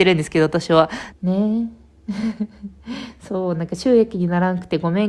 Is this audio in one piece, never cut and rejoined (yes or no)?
no